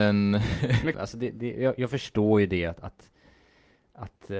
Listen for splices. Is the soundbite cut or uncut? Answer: cut